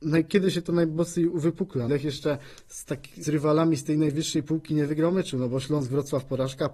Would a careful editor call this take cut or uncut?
cut